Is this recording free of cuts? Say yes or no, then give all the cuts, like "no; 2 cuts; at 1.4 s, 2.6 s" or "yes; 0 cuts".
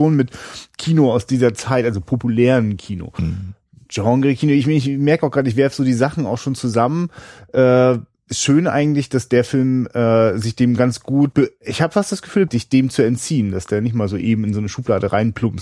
no; 2 cuts; at 11.3 s, 12.5 s